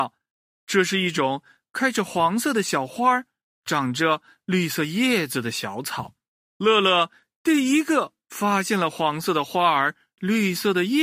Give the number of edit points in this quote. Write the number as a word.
one